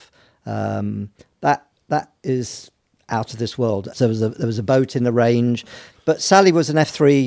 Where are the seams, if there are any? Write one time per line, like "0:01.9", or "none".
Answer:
0:03.9
0:05.9